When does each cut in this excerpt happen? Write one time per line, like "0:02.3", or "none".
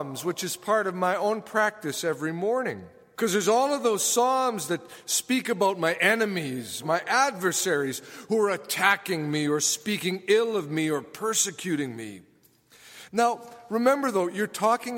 0:06.8
0:13.1